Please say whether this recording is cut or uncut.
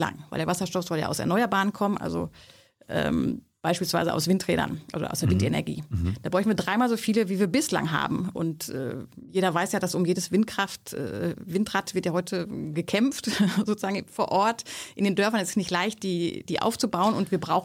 uncut